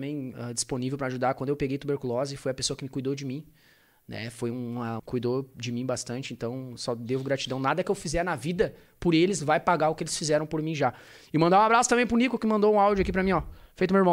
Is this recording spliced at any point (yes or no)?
yes